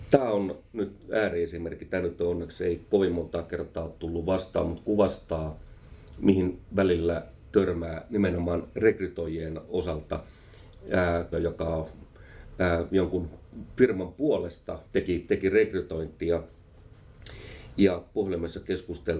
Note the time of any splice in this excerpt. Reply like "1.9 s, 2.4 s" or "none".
11.3 s, 14.9 s